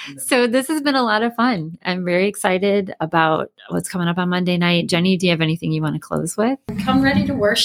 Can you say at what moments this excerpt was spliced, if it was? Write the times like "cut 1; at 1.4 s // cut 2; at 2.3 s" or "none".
none